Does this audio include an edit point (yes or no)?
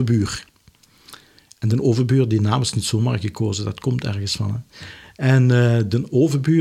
no